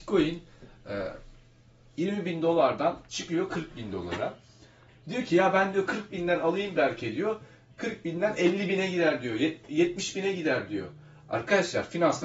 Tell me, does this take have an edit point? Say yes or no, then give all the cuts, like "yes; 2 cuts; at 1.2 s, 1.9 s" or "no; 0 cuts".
yes; 1 cut; at 4.9 s